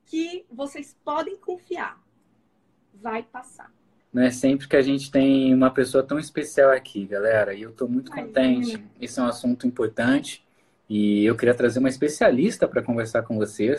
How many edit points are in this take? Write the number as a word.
one